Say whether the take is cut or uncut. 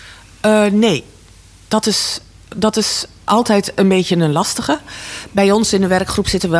uncut